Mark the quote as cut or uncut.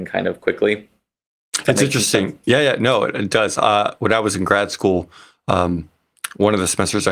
uncut